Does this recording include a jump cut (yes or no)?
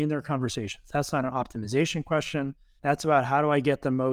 yes